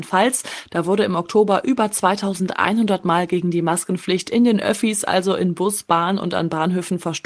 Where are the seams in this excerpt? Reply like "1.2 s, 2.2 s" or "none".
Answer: none